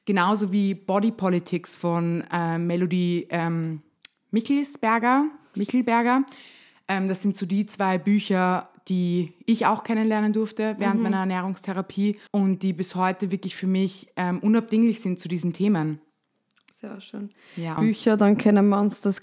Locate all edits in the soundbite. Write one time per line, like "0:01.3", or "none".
0:12.3
0:17.8